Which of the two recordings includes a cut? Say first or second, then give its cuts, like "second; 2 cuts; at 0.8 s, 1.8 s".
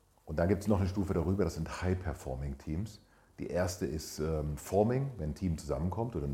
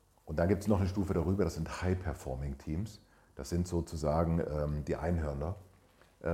first; 1 cut; at 3.3 s